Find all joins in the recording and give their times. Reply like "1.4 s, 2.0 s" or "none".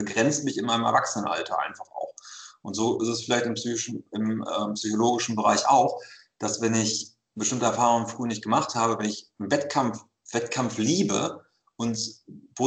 none